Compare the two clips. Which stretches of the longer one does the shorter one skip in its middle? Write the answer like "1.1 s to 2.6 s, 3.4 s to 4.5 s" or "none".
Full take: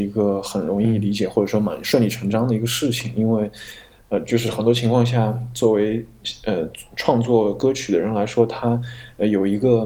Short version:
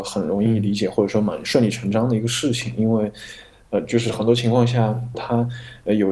5.5 s to 8.5 s